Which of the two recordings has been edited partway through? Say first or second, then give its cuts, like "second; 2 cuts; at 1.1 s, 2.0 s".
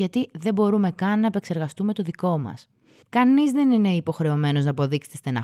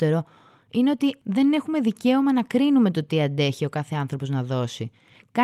first; 1 cut; at 3.0 s